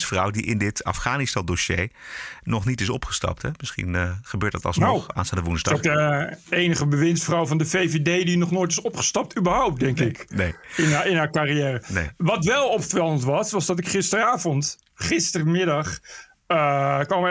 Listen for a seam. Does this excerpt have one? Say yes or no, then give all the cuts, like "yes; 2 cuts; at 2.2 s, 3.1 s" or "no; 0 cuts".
no; 0 cuts